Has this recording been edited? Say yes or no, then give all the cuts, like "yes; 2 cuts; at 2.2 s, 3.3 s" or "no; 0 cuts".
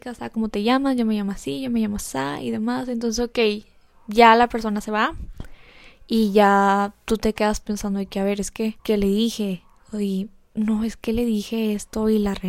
yes; 1 cut; at 8.8 s